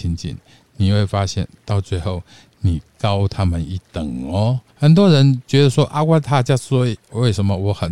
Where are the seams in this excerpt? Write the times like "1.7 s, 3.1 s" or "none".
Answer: 4.7 s